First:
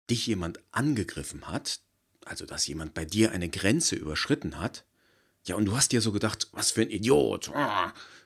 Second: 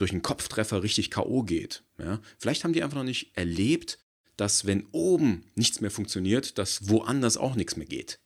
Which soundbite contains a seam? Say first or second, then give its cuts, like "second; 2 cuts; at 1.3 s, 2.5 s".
first; 1 cut; at 6.5 s